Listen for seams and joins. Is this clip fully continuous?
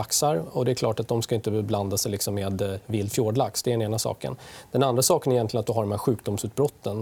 yes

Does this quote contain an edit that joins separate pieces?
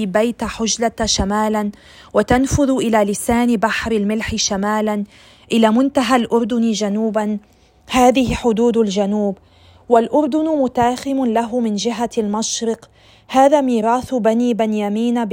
no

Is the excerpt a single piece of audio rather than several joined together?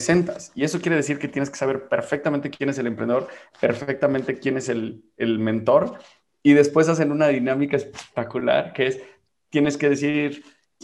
yes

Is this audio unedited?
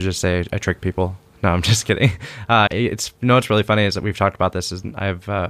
no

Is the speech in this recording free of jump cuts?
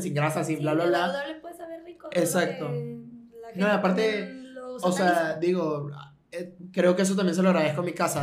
yes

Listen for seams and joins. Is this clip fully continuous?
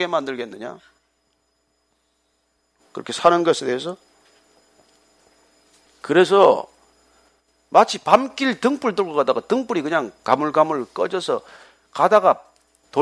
no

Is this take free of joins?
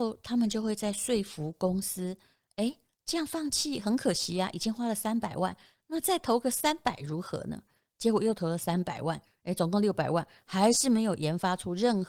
yes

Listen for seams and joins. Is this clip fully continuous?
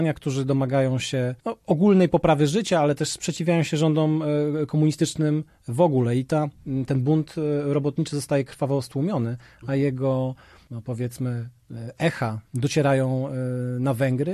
no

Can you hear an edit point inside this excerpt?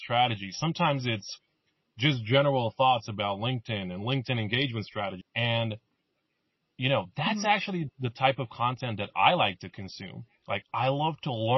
yes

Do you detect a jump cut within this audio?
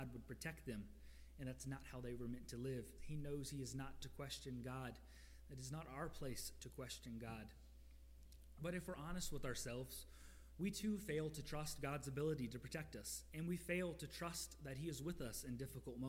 yes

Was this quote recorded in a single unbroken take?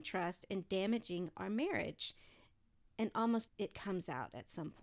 no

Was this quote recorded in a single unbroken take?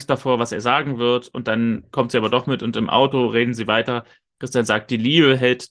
yes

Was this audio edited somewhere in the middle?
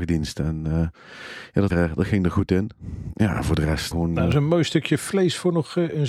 yes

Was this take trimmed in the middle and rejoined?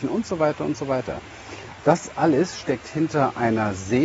yes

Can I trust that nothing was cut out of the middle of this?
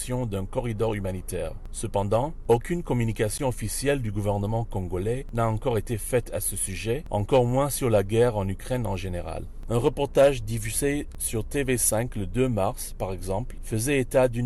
no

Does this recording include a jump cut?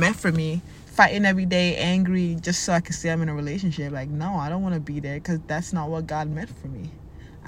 no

